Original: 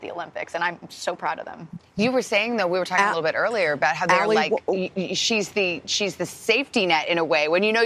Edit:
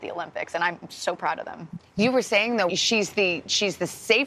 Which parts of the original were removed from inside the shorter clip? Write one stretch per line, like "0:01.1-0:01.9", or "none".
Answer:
0:02.7-0:05.1

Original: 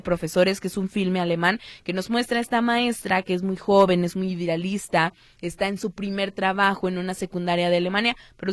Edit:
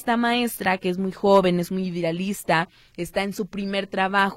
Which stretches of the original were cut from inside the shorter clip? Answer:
none

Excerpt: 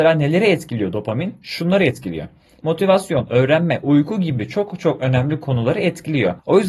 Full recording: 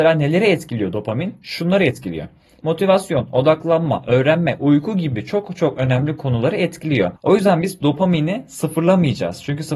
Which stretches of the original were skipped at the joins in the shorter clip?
0:03.3-0:04.0

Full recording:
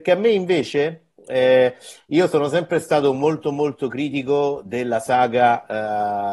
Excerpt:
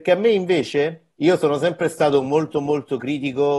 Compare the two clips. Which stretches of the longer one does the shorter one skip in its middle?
0:01.2-0:02.1

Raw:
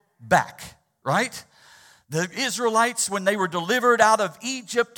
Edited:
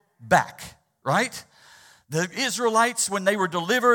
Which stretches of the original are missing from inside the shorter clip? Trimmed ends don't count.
none

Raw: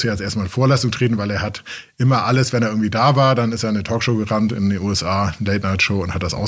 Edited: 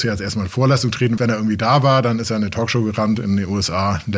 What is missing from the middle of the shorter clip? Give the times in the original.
0:01.2-0:02.5

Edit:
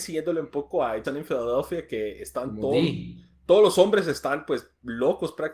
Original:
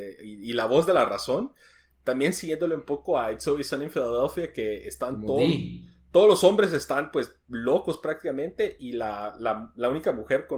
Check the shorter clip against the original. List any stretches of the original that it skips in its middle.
0:03.4-0:03.7

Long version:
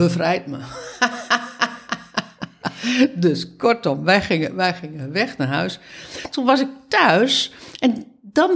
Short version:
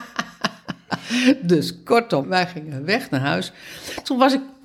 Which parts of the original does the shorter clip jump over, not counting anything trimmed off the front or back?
0:04.0-0:04.5

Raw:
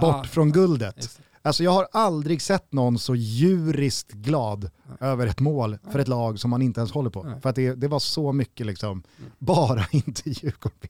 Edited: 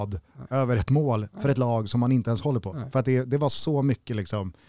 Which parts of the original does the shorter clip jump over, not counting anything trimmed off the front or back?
none

